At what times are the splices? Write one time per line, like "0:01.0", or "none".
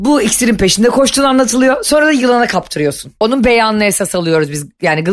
0:03.2